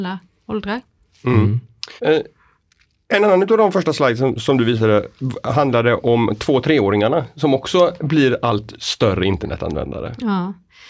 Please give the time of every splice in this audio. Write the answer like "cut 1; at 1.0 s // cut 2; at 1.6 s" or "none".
cut 1; at 2.0 s